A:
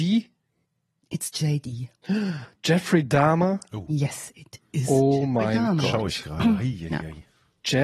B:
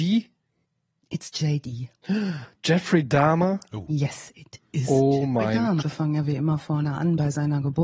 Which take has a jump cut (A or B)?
B